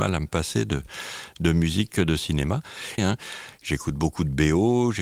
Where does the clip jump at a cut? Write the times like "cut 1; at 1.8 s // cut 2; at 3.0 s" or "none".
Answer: cut 1; at 3.0 s